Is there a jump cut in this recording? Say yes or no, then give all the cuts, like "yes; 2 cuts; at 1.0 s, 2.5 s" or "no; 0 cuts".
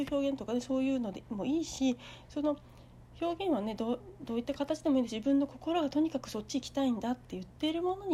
no; 0 cuts